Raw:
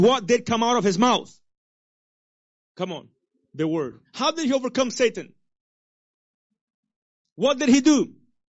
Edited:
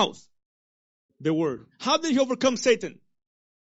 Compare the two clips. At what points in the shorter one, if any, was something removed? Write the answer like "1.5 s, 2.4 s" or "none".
1.1 s